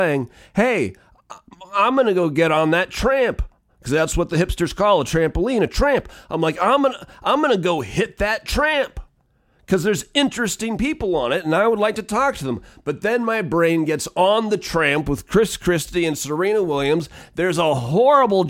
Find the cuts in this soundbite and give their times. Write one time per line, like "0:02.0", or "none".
none